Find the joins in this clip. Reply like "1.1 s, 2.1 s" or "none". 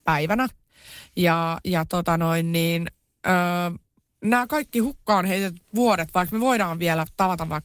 none